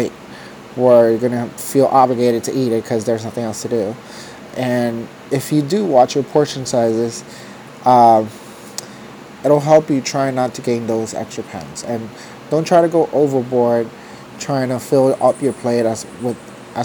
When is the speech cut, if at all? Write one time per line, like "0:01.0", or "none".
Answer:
none